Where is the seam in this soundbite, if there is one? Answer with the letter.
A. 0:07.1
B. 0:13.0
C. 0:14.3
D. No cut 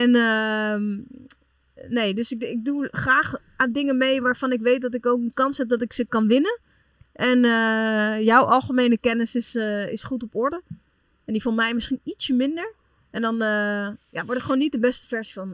D